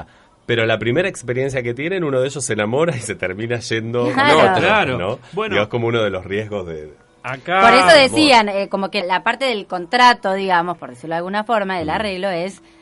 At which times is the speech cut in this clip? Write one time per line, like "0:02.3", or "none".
0:09.0